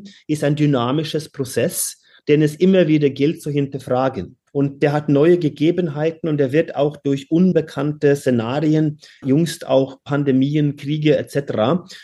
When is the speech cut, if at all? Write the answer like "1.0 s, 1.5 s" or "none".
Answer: 4.5 s, 9.2 s

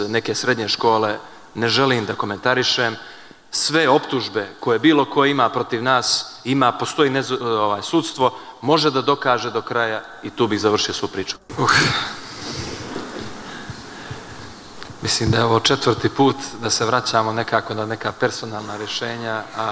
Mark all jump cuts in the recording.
7.4 s, 11.5 s

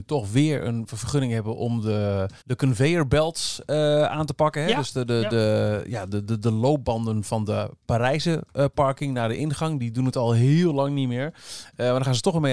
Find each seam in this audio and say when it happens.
2.4 s

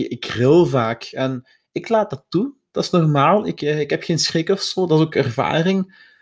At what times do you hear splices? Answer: 3.6 s

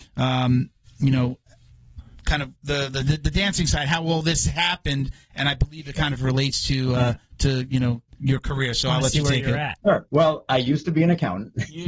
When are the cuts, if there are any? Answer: 9.8 s

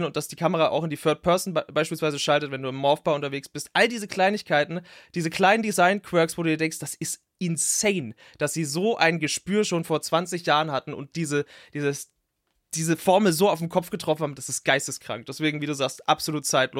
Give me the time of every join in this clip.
none

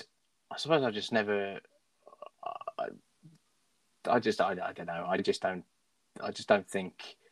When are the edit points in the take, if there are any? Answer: 5.2 s

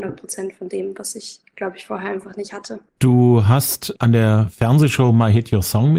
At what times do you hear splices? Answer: 2.9 s

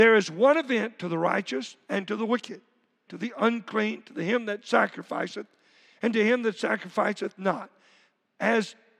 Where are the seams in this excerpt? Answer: 3.1 s

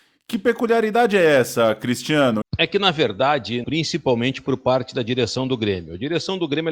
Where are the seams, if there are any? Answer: 2.4 s, 3.6 s

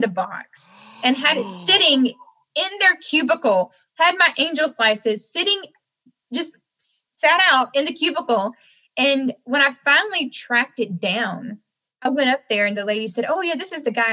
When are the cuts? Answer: none

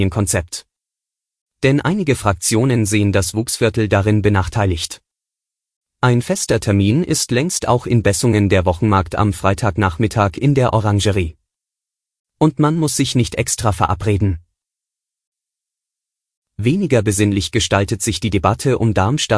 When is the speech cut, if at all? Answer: 5.9 s, 12.3 s

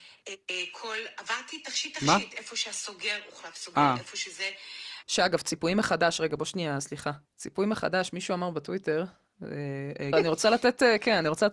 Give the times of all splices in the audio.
5.0 s, 7.2 s, 10.1 s

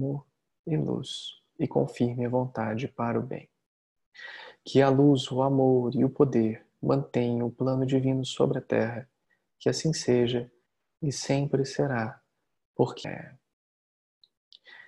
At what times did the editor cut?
13.0 s

